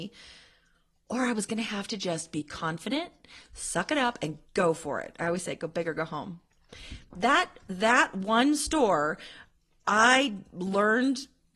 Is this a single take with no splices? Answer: yes; 0 cuts

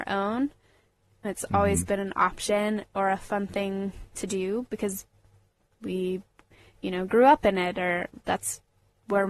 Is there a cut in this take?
yes; 1 cut; at 1.2 s

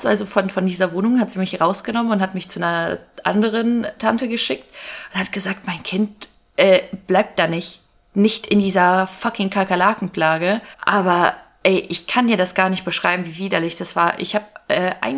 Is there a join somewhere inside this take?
yes; 1 cut; at 10.7 s

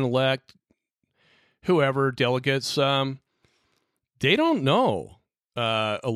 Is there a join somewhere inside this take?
no; 0 cuts

